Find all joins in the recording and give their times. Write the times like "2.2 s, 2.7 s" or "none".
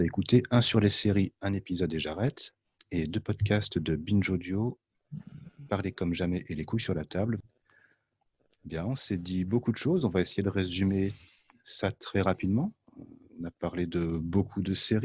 none